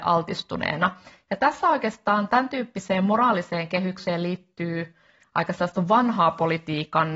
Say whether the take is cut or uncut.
uncut